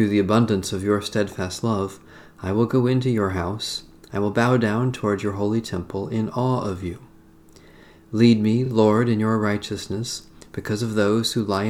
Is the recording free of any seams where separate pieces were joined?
yes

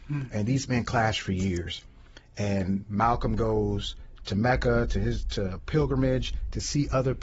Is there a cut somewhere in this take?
yes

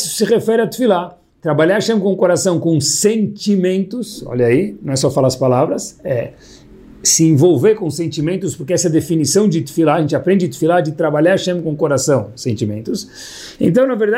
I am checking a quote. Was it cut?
no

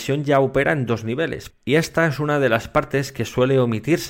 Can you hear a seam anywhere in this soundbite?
yes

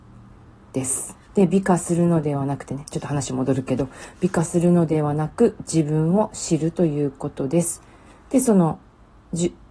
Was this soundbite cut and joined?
yes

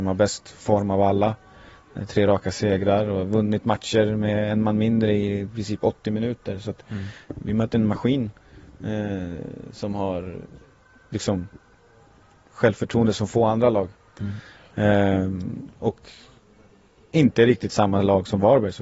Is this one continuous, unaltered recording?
yes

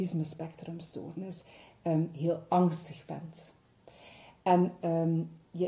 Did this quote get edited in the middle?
no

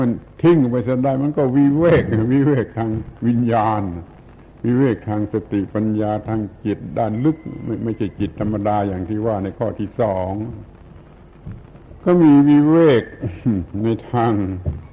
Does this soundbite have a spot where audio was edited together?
no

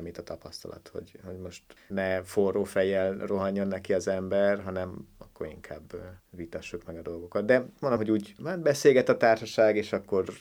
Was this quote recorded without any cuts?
no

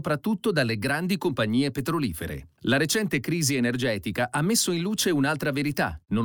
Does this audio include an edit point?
no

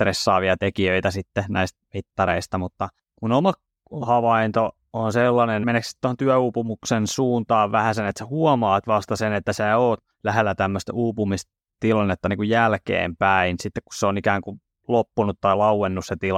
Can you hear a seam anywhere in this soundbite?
yes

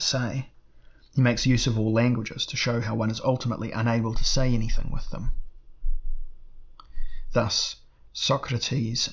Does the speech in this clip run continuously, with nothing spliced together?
yes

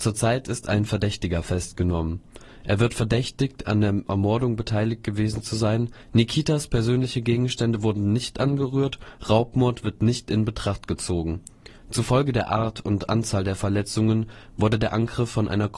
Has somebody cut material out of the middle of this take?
yes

